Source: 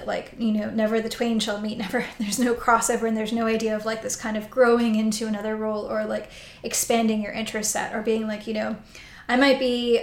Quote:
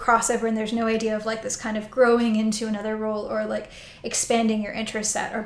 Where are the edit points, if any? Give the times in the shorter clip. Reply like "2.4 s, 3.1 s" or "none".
none